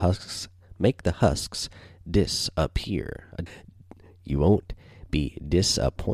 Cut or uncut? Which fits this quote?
cut